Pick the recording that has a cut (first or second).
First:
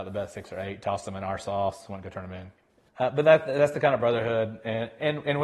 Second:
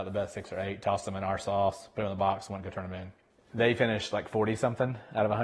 first